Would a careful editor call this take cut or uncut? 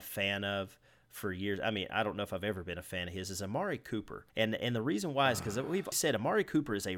cut